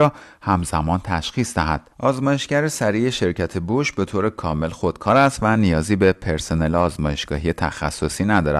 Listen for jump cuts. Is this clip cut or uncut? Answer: cut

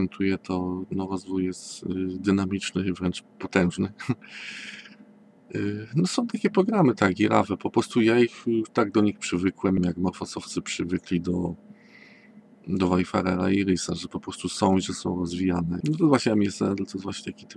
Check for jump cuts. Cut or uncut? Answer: cut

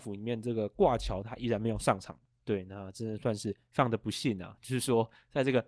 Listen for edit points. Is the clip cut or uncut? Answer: uncut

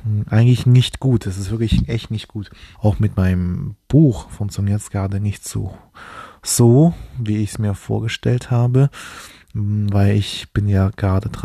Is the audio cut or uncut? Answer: cut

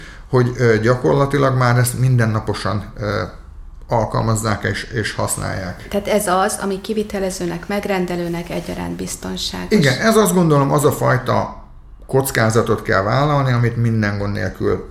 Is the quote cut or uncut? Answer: uncut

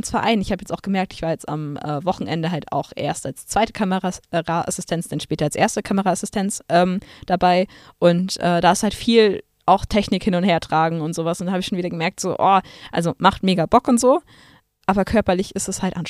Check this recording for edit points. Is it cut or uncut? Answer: uncut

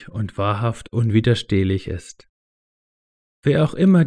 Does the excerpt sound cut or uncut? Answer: uncut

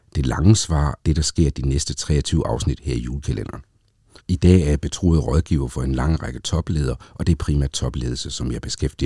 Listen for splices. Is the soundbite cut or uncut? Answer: cut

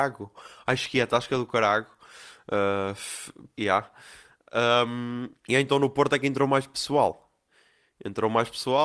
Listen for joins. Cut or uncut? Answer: cut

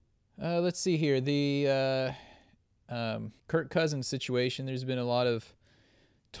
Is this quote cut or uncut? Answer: cut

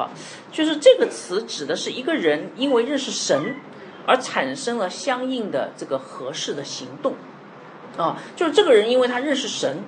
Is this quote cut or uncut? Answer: uncut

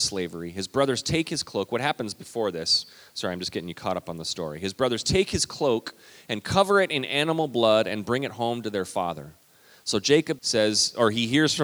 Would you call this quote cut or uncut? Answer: cut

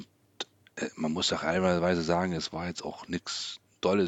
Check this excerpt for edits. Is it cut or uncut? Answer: uncut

